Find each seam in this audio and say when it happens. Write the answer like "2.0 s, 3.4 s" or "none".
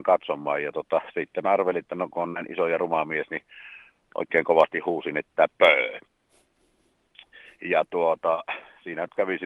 none